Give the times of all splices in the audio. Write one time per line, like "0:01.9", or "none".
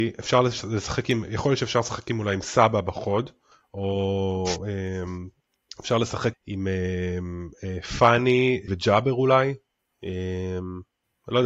0:06.3
0:08.7